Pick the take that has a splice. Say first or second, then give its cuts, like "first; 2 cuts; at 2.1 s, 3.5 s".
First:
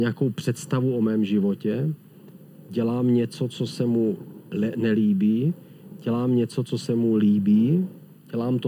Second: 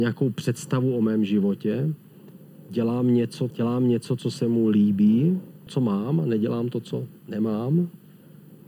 second; 2 cuts; at 3.5 s, 5.7 s